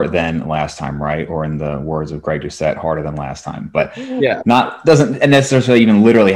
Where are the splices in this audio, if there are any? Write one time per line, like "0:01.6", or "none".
none